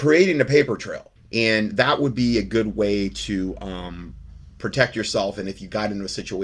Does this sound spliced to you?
yes; 2 cuts; at 1.2 s, 4.5 s

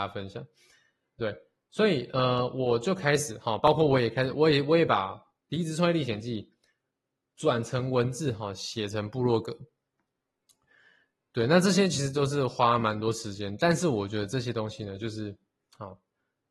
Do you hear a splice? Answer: no; 0 cuts

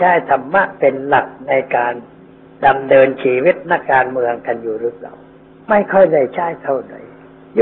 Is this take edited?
yes; 1 cut; at 3.8 s

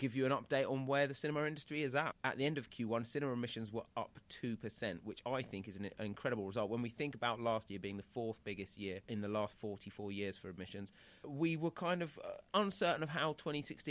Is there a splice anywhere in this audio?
no; 0 cuts

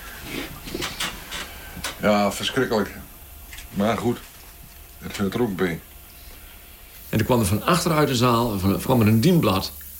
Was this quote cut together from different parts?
yes; 3 cuts; at 3.7 s, 7.1 s, 8.9 s

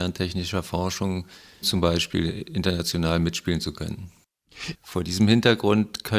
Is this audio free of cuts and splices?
no; 2 cuts; at 1.6 s, 4.7 s

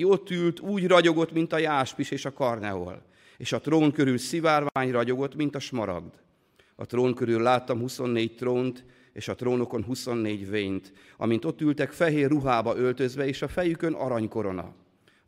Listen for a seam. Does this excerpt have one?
no; 0 cuts

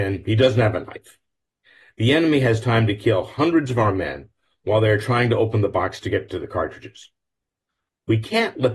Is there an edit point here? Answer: no; 0 cuts

